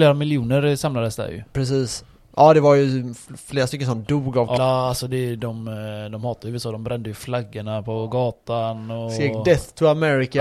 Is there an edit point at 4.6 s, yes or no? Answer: yes